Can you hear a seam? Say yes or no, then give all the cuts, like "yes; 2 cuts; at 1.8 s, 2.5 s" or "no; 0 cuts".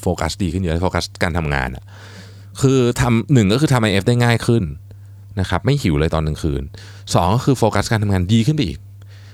no; 0 cuts